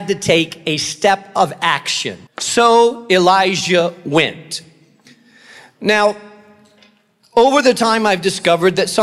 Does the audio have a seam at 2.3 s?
yes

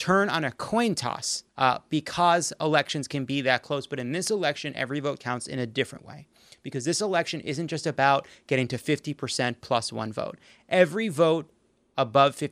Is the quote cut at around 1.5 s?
yes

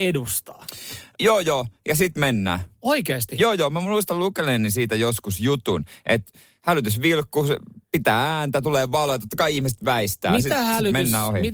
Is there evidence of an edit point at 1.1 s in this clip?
yes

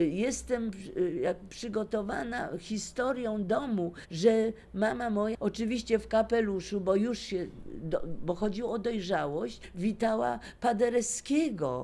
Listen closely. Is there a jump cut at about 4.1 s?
no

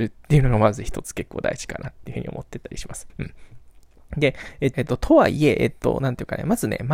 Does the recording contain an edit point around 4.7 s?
yes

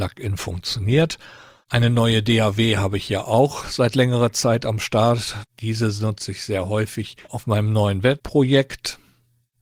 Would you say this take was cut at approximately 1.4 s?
no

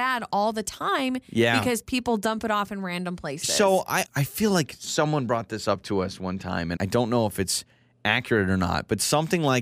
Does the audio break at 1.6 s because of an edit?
no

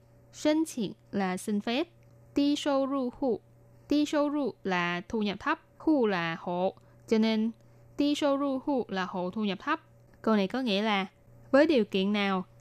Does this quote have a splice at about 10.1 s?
yes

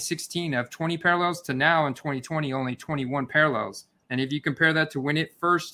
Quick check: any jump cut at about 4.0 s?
yes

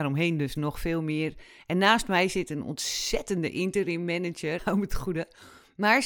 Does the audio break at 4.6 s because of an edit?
yes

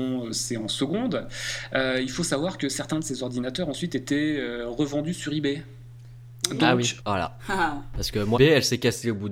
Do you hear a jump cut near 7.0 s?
yes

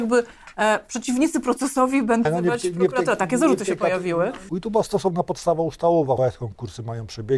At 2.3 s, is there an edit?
yes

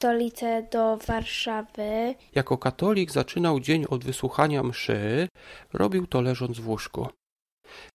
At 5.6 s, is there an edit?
yes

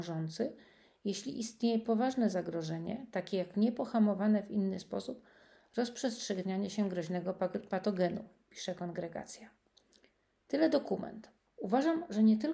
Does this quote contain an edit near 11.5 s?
yes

